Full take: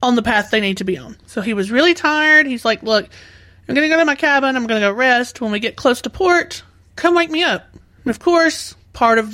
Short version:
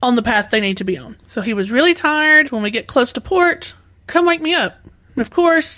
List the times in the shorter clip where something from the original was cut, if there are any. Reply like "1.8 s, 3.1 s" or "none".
2.4 s